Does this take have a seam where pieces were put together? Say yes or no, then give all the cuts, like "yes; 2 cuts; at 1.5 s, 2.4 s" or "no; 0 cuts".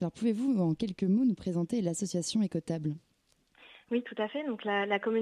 no; 0 cuts